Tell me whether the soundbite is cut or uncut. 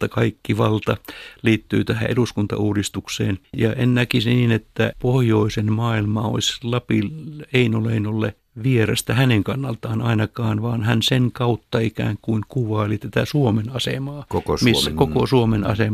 uncut